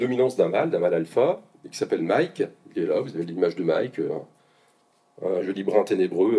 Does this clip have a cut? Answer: no; 0 cuts

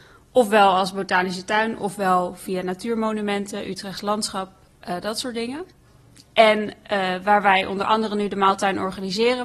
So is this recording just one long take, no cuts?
yes; 0 cuts

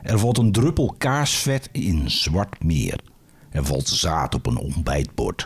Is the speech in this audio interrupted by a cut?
no; 0 cuts

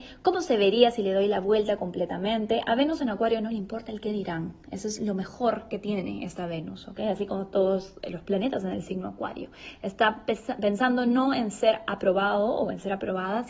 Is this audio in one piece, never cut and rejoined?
yes; 0 cuts

